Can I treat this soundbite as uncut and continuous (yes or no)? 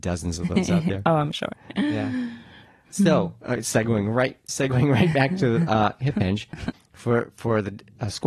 no